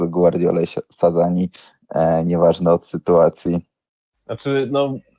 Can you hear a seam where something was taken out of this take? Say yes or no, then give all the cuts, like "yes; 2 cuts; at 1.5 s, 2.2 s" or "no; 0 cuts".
no; 0 cuts